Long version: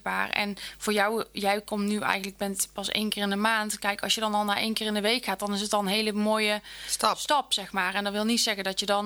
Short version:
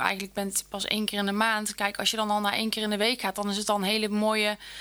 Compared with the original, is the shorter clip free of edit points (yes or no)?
yes